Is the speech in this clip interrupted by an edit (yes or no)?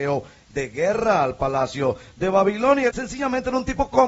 yes